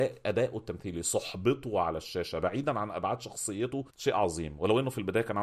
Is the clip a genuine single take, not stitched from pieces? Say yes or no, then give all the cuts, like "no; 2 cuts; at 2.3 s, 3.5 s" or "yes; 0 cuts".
no; 1 cut; at 3.9 s